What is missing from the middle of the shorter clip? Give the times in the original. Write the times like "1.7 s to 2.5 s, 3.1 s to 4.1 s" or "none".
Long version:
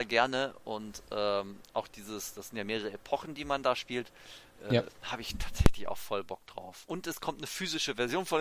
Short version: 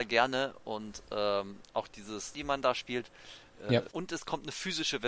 2.3 s to 3.4 s, 4.9 s to 6.9 s